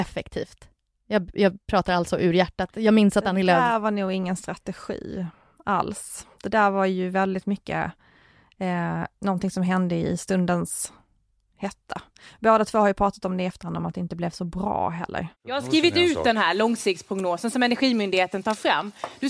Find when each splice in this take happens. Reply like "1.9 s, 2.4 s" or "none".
15.4 s